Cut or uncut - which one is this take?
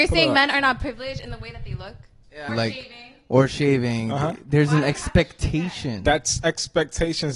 cut